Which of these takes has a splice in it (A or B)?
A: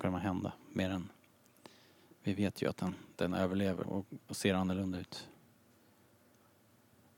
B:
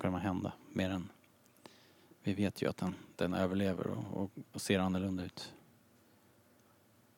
A